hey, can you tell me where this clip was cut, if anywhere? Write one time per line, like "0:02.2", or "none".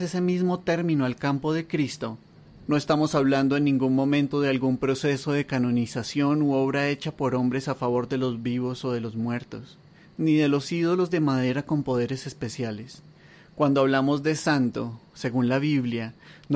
none